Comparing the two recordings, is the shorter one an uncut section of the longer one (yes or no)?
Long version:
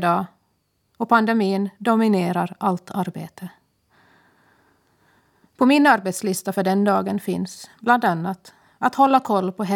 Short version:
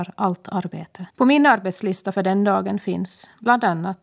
no